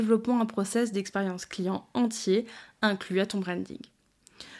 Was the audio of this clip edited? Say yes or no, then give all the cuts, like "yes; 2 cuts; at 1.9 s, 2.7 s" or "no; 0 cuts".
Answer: no; 0 cuts